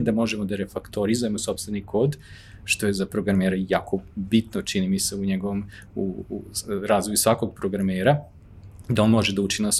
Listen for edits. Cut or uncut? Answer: uncut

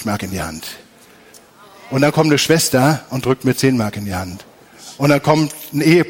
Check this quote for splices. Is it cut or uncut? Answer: uncut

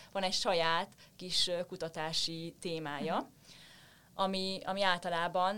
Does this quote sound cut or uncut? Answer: uncut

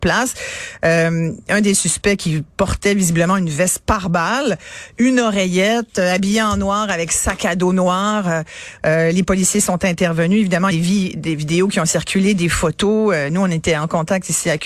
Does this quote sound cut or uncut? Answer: cut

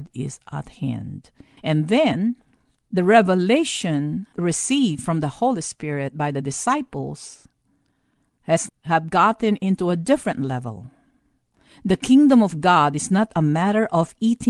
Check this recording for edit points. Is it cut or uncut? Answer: cut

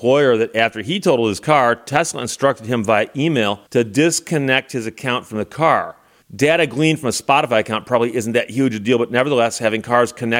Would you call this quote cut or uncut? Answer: cut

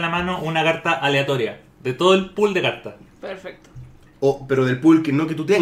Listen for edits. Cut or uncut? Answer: uncut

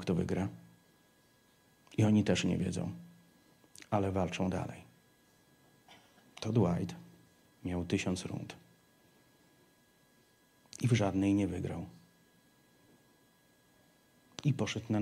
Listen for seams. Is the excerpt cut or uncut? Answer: uncut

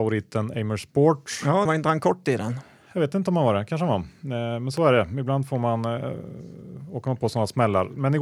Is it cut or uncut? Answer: cut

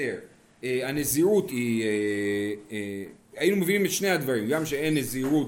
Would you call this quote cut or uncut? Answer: cut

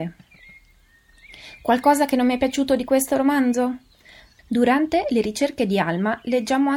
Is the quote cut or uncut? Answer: cut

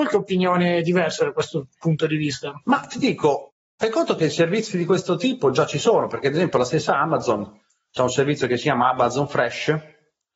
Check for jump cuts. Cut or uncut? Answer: cut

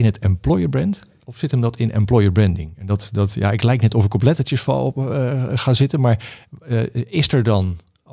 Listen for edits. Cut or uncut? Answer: uncut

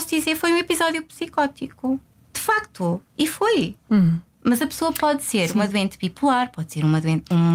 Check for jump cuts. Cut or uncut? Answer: uncut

